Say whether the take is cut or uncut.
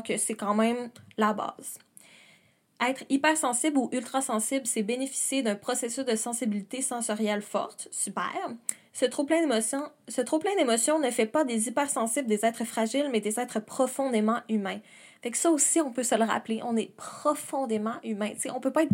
uncut